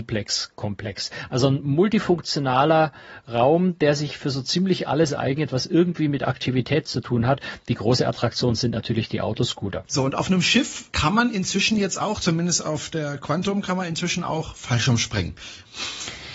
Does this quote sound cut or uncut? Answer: uncut